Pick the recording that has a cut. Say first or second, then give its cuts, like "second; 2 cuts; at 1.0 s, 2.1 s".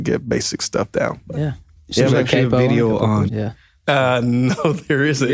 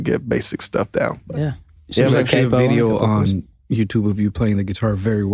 first; 1 cut; at 3.3 s